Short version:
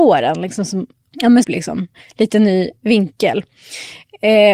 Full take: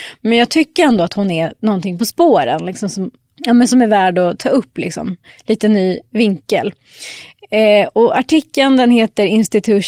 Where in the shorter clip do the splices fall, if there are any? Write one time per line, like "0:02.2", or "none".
0:01.4